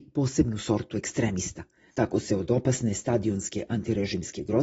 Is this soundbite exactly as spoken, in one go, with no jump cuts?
no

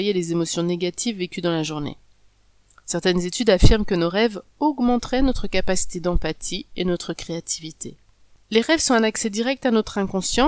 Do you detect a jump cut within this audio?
no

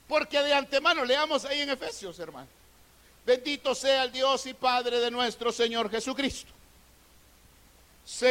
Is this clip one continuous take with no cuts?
yes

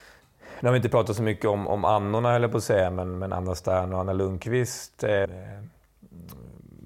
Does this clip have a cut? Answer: yes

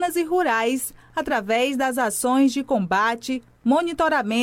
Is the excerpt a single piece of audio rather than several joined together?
yes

